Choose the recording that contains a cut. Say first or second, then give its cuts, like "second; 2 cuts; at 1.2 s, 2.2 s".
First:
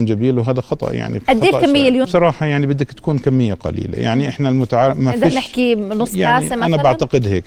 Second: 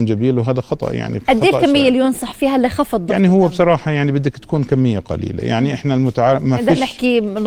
first; 1 cut; at 2.0 s